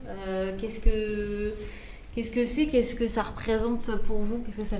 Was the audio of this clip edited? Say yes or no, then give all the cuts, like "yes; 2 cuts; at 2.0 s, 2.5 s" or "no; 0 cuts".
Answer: no; 0 cuts